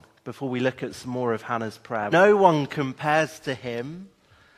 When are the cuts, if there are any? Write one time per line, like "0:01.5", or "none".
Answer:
0:02.1